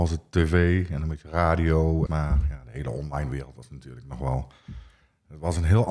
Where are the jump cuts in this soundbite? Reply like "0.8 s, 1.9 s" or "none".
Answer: 2.1 s